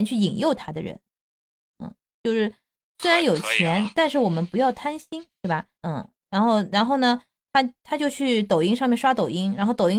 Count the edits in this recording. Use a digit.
2